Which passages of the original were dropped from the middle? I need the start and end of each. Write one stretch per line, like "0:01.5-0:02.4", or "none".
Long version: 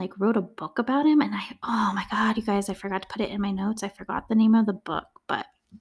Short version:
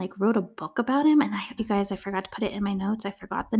0:01.6-0:02.3